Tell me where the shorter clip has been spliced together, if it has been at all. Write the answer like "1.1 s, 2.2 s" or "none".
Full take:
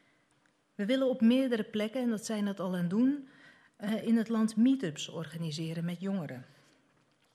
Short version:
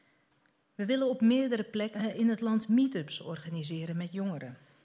1.9 s